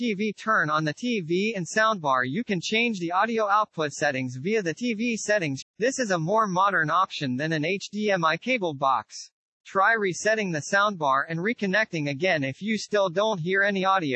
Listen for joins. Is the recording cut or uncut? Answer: cut